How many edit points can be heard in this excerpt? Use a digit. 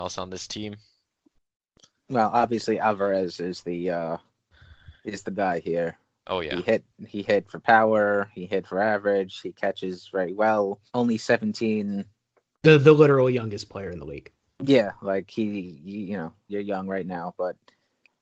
3